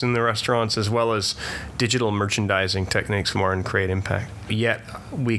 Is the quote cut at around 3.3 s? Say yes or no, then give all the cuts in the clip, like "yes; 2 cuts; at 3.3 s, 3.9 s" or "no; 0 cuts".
yes; 2 cuts; at 3.3 s, 4.5 s